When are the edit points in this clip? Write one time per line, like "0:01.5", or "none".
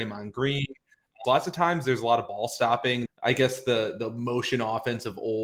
0:01.2
0:03.1